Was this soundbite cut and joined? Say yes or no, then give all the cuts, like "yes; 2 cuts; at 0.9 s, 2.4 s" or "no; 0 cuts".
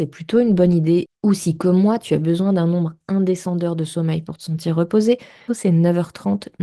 yes; 2 cuts; at 1.1 s, 5.5 s